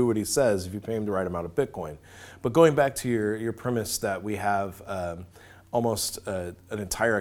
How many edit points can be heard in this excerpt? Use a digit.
0